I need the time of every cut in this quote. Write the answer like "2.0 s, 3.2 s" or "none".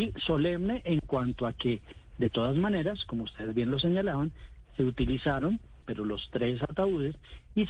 5.8 s